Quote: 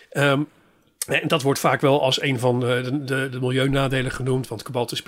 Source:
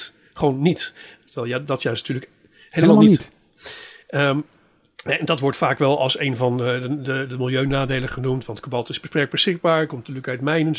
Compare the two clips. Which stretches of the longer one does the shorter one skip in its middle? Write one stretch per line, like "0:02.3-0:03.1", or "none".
none